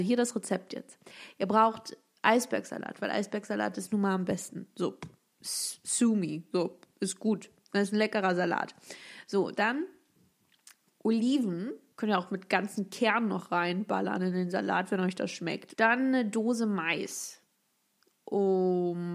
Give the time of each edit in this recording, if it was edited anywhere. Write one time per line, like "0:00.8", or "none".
0:11.9
0:15.7